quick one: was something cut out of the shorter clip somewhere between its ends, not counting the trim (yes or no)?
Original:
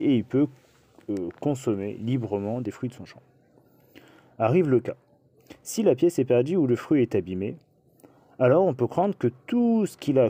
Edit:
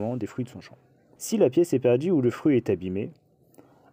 yes